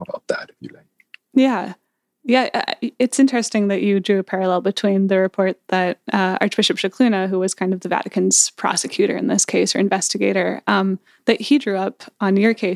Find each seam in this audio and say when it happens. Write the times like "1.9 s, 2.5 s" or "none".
none